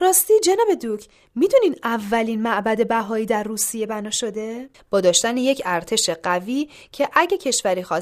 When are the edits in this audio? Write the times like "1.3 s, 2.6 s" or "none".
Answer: 4.7 s